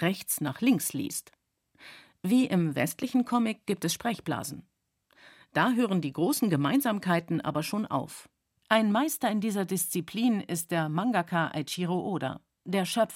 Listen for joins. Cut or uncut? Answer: cut